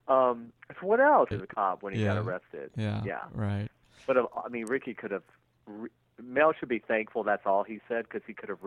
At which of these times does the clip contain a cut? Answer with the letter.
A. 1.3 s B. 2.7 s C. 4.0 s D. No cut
A